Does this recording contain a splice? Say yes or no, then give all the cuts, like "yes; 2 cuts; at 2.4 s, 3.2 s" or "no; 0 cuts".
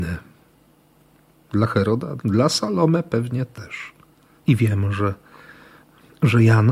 yes; 2 cuts; at 2.2 s, 4.4 s